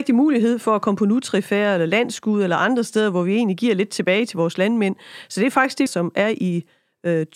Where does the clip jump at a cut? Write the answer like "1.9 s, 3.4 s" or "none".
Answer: 5.9 s